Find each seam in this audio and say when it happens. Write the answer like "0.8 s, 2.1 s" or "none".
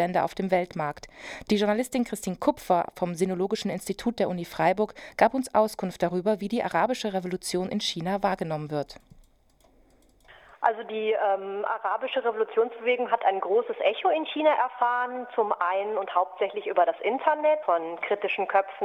1.4 s, 17.6 s